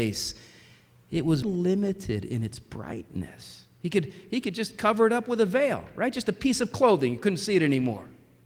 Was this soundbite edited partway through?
yes; 1 cut; at 1.4 s

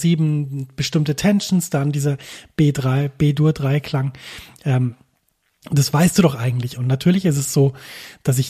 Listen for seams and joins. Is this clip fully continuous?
no; 1 cut; at 6.8 s

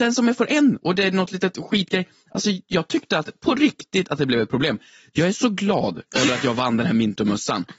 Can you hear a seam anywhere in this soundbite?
no; 0 cuts

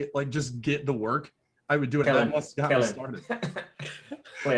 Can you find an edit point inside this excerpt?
yes; 1 cut; at 2.0 s

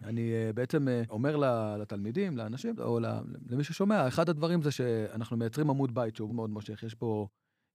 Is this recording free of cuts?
no; 1 cut; at 6.3 s

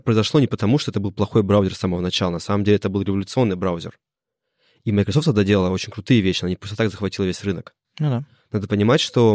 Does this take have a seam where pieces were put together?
no; 0 cuts

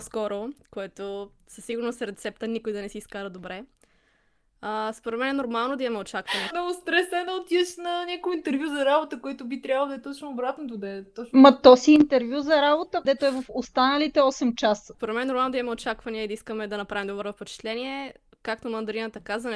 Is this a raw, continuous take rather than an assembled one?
no; 3 cuts; at 6.5 s, 13.0 s, 14.9 s

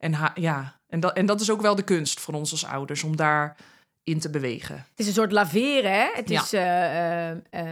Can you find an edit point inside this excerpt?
no; 0 cuts

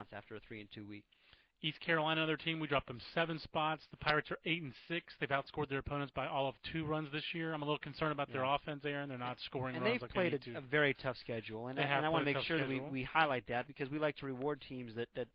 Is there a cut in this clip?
no; 0 cuts

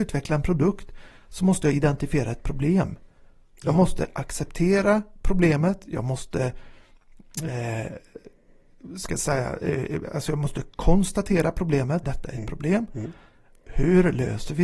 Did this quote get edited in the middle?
yes; 1 cut; at 12.0 s

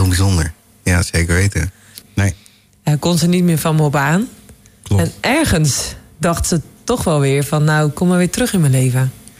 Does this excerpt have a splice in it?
yes; 1 cut; at 2.0 s

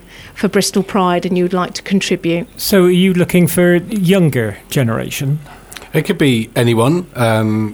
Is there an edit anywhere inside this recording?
no; 0 cuts

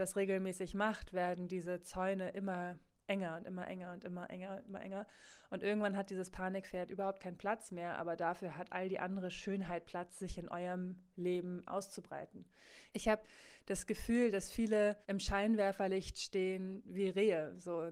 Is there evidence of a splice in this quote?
yes; 2 cuts; at 12.9 s, 15.0 s

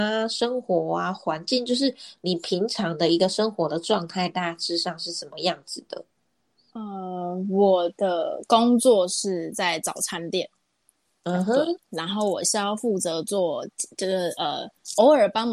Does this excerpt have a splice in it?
no; 0 cuts

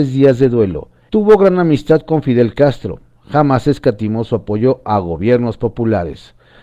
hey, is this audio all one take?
no; 1 cut; at 1.1 s

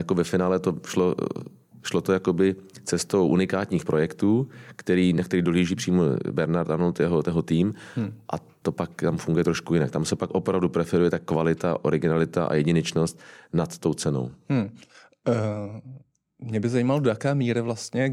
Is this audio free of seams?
yes; 0 cuts

